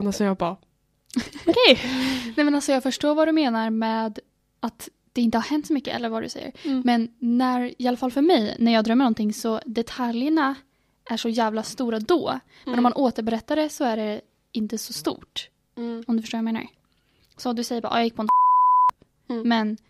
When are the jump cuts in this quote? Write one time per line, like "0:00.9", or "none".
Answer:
none